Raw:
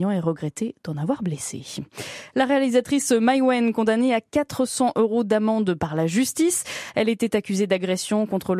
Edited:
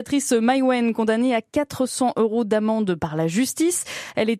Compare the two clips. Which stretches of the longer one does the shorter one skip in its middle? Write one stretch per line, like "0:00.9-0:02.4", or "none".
none